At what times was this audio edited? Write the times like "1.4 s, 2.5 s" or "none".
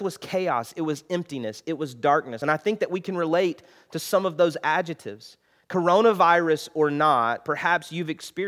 none